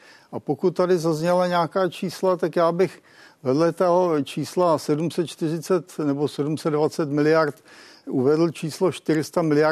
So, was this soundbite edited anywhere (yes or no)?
no